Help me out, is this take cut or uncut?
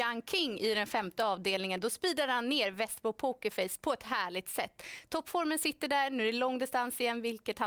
uncut